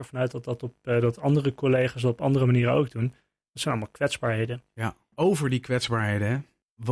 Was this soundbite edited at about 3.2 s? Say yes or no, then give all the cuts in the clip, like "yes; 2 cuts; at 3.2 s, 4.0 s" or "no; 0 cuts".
no; 0 cuts